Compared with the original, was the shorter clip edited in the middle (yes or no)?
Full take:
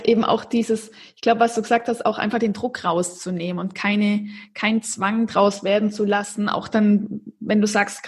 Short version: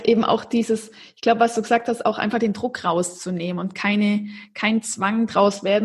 no